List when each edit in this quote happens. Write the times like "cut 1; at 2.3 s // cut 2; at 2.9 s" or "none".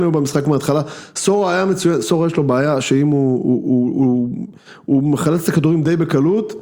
none